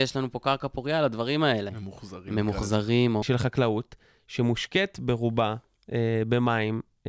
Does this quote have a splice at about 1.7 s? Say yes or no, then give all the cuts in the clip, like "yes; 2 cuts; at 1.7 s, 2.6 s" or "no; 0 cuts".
yes; 2 cuts; at 1.7 s, 3.2 s